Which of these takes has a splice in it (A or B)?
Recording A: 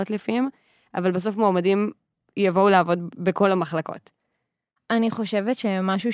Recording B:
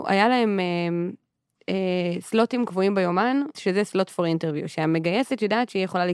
B